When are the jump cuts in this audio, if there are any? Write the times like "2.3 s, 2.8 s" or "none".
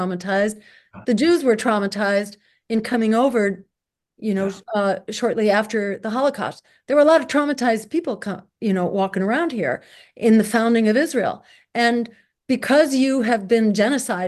none